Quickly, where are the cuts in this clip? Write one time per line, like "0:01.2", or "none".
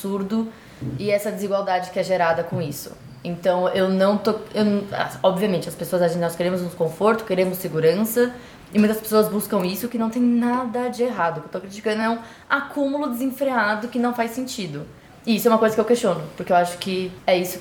none